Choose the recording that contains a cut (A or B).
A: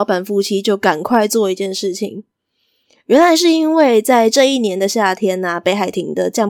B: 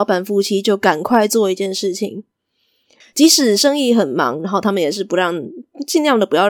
B